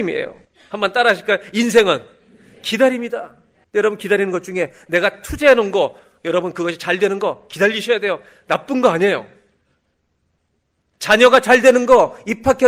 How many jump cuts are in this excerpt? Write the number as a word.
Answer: one